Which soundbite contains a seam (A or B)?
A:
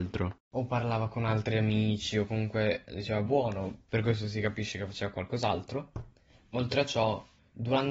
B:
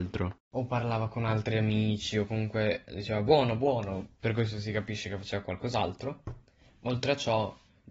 A